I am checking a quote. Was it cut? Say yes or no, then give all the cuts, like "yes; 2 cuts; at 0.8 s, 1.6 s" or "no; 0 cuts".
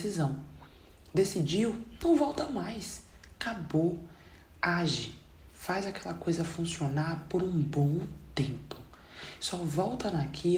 no; 0 cuts